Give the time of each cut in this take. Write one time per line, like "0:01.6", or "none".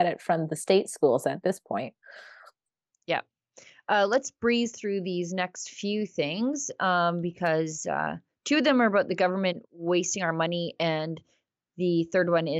none